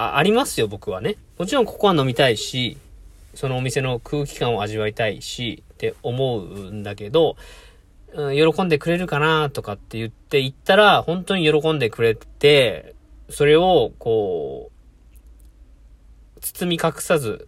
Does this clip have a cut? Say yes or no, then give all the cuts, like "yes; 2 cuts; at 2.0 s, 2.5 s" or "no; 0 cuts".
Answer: yes; 1 cut; at 1.3 s